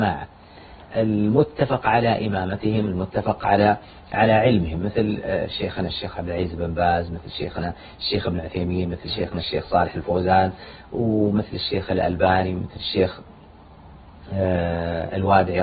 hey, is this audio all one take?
yes; 0 cuts

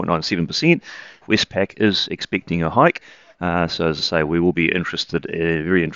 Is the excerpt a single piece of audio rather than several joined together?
no; 1 cut; at 1.2 s

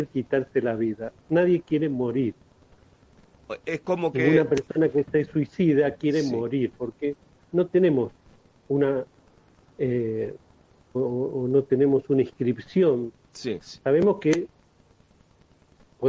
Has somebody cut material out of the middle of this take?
yes; 2 cuts; at 10.9 s, 13.6 s

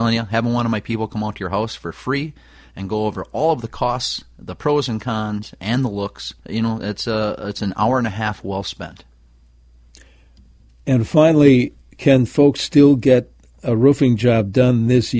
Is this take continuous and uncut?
no; 1 cut; at 6.4 s

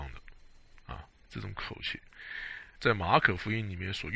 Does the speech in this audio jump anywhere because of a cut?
yes; 2 cuts; at 1.2 s, 2.7 s

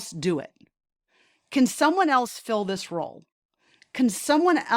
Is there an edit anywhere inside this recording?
no; 0 cuts

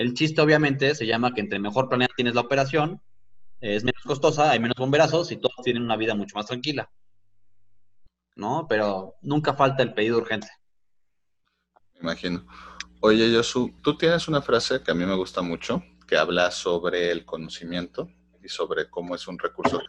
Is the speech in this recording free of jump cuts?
yes; 0 cuts

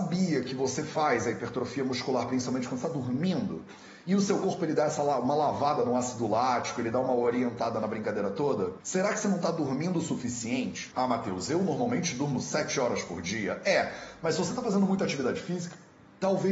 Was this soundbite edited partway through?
no; 0 cuts

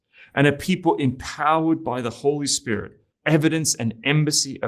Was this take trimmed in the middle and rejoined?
yes; 1 cut; at 3.1 s

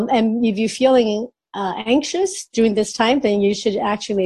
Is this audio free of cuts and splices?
yes; 0 cuts

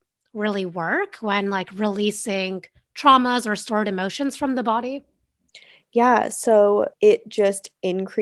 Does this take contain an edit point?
yes; 1 cut; at 6.9 s

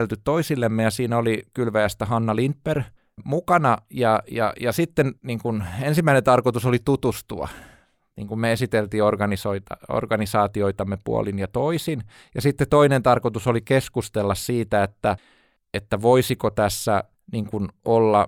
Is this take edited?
no; 0 cuts

